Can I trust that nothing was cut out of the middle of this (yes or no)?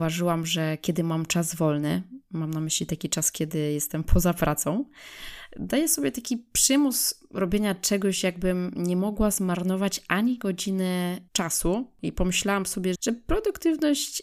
no